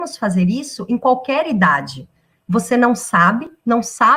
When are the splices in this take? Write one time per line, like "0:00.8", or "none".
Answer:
0:02.4

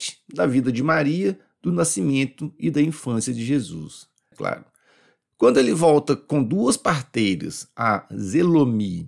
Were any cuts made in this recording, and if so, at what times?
0:04.3

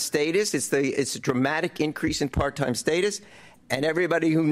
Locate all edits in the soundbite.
0:00.9
0:03.5

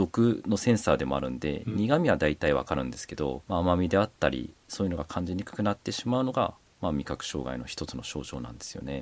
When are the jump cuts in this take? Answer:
0:03.4

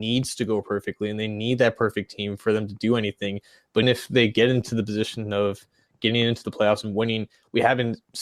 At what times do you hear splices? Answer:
0:03.8

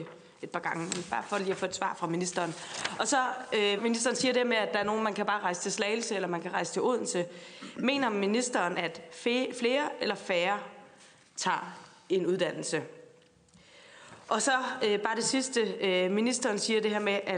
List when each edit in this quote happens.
0:03.8
0:08.7

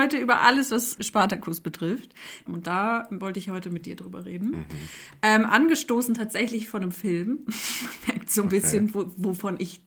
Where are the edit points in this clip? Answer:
0:01.0
0:02.5

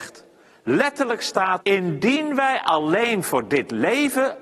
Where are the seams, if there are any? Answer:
0:01.6

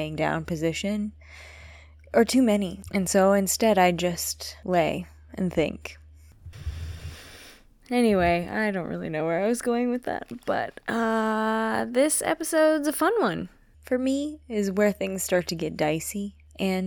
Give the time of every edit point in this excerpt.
0:13.7

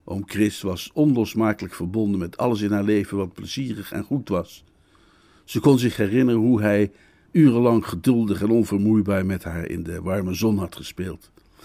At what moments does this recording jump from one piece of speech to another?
0:07.3

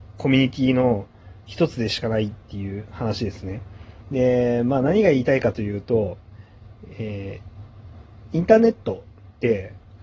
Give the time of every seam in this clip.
0:04.0

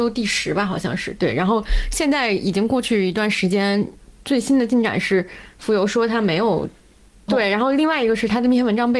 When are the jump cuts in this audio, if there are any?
0:07.3

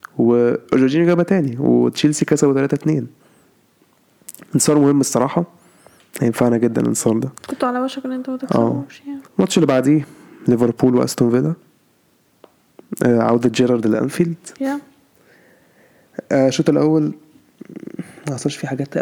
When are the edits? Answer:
0:07.4
0:09.3

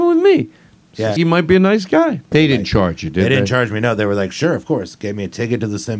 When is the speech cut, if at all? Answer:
0:01.2
0:02.3

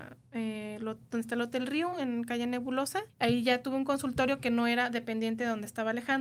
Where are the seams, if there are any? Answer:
0:03.1

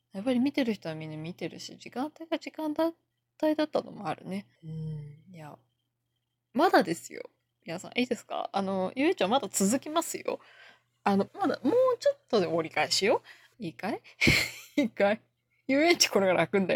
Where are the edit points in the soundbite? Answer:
0:04.5
0:11.3
0:13.5

